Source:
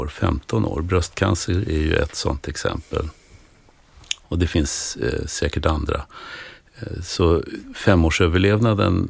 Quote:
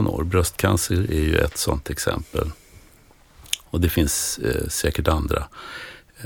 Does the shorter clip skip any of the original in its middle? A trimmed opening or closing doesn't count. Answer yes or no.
no